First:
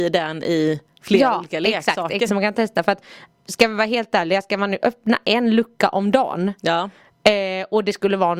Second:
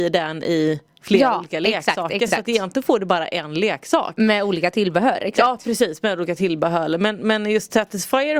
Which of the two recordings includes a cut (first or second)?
first